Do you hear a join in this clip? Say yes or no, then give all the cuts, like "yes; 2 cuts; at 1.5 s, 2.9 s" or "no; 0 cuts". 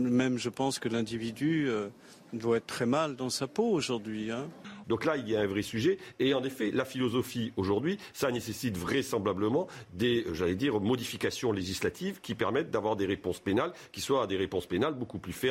yes; 1 cut; at 4.8 s